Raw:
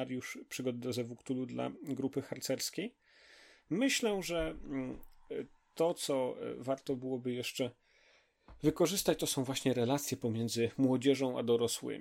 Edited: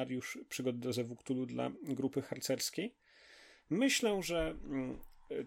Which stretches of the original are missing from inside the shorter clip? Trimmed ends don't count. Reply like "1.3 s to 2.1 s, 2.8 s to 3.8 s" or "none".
none